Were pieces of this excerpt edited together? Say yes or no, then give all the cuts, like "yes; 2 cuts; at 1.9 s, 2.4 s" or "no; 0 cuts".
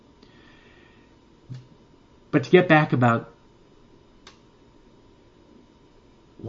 no; 0 cuts